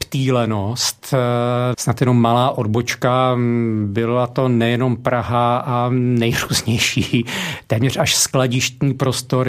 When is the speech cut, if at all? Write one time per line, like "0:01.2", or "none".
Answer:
0:01.7